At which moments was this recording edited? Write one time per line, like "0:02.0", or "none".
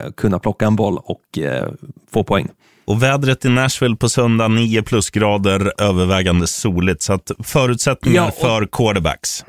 none